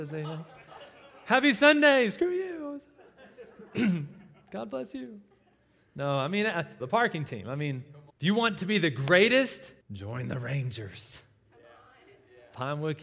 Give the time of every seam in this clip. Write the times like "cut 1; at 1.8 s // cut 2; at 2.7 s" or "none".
cut 1; at 6.8 s // cut 2; at 8.1 s // cut 3; at 9.8 s